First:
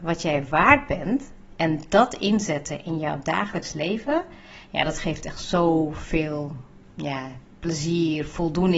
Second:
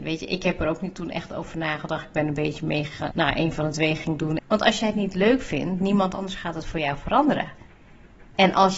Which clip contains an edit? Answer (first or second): second